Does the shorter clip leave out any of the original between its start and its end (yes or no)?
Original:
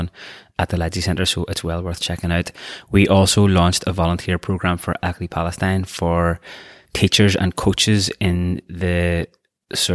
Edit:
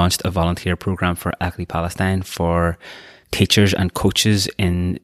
no